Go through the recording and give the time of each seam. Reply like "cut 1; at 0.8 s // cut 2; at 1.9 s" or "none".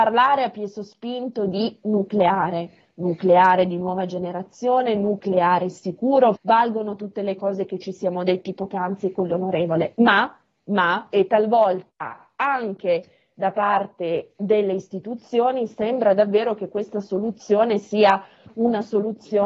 cut 1; at 6.4 s